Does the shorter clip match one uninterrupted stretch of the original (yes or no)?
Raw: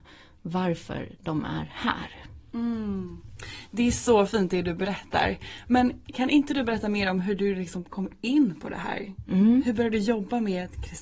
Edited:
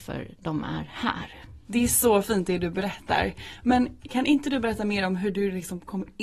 no